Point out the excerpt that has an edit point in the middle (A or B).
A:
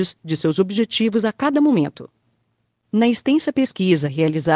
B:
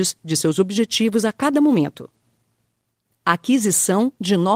A